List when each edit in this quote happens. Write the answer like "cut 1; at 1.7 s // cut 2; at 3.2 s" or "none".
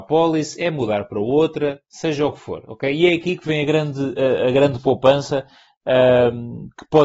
none